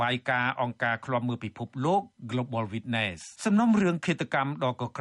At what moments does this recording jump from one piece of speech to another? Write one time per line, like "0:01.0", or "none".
0:03.4